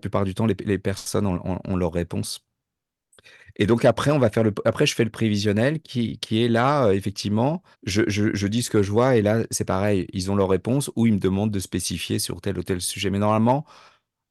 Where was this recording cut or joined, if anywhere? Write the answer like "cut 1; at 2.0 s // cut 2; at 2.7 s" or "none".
cut 1; at 7.7 s